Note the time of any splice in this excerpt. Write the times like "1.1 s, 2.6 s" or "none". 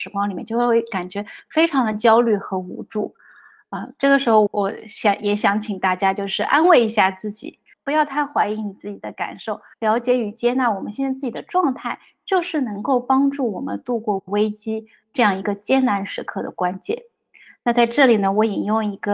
4.5 s, 7.7 s, 9.7 s